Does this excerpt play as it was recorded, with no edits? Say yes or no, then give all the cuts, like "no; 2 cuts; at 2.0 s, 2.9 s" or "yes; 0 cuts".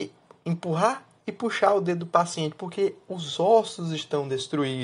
yes; 0 cuts